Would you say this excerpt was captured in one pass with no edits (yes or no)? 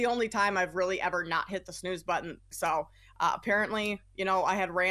no